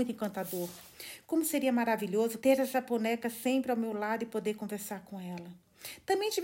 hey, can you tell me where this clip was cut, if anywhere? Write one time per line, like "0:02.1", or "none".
0:02.4